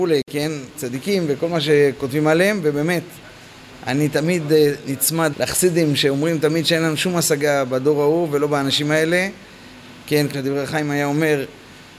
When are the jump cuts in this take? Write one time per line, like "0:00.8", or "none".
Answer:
0:05.3
0:10.3